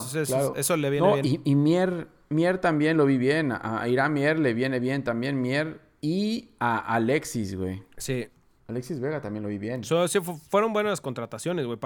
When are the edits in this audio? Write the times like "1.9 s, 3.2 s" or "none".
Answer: none